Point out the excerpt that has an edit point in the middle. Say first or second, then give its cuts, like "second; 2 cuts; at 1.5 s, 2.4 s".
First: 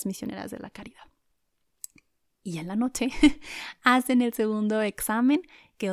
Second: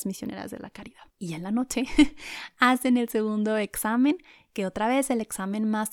second; 1 cut; at 1.1 s